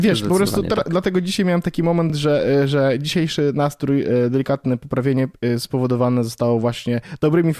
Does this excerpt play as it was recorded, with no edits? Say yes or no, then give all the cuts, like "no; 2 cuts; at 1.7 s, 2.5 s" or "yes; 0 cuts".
yes; 0 cuts